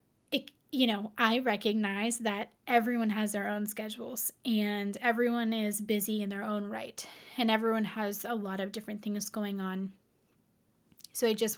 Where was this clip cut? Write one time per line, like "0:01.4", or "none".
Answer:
none